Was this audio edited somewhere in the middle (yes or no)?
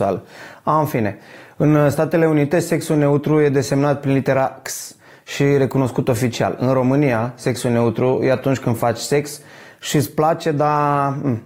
no